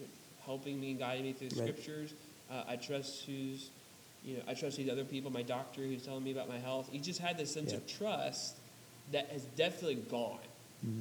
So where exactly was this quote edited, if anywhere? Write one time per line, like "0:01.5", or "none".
none